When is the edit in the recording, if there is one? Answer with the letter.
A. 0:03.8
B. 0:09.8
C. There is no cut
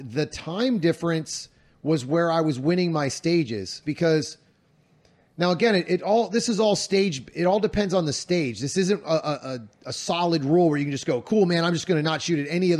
A